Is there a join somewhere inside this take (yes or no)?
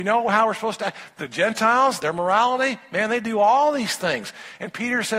no